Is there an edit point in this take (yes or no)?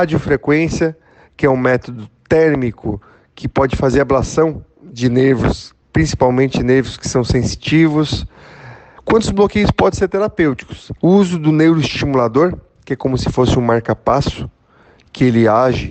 yes